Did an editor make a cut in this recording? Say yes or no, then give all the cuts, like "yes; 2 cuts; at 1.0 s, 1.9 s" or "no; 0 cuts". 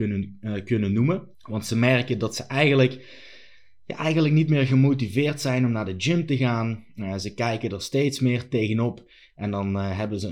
yes; 1 cut; at 1.3 s